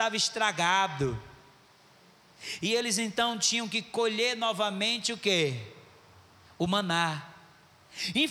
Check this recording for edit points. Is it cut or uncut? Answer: uncut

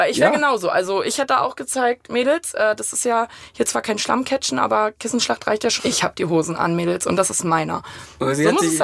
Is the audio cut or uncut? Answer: cut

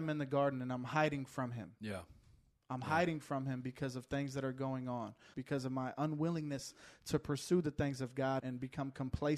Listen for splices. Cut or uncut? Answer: cut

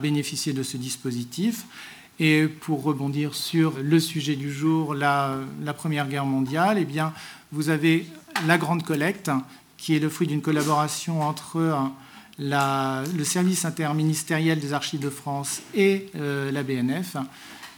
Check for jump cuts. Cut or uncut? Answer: cut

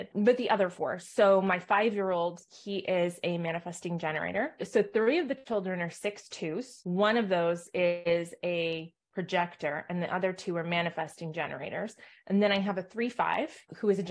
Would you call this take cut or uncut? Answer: uncut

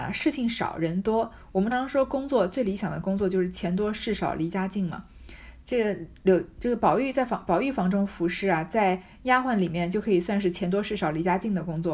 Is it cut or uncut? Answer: cut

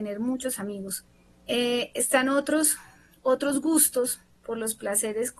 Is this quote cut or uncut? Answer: uncut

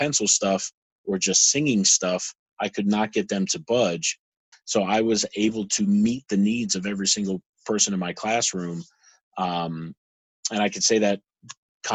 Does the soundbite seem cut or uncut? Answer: cut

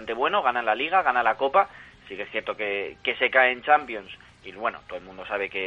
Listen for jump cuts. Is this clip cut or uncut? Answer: uncut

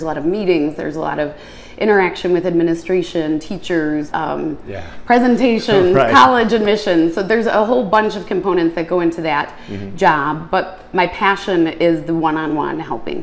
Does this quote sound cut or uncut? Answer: cut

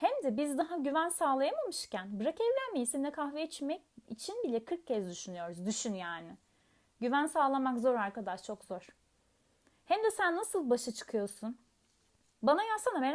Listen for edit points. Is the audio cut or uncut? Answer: uncut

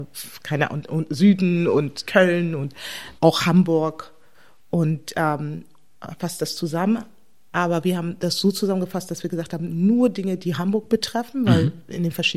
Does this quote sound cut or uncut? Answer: cut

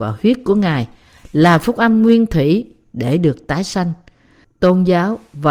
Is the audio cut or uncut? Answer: cut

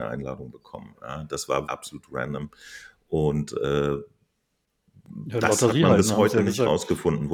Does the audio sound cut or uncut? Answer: cut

